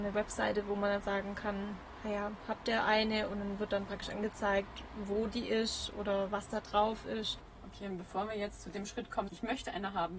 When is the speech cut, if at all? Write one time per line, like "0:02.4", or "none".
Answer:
0:09.3